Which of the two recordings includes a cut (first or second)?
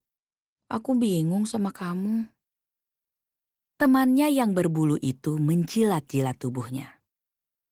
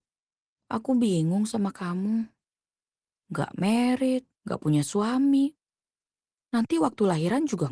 second